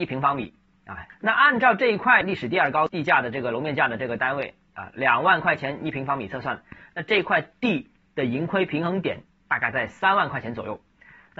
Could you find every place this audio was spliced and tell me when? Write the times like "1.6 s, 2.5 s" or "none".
none